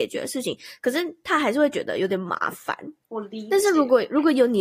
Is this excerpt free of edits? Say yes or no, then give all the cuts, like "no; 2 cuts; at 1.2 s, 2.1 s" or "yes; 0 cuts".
yes; 0 cuts